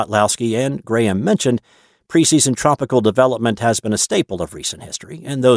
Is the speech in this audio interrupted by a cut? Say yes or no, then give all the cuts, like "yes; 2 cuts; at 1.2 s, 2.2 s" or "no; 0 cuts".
no; 0 cuts